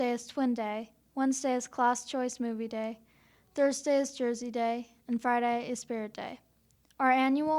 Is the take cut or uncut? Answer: uncut